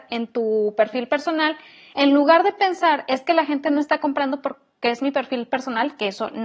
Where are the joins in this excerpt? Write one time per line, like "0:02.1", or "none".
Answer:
none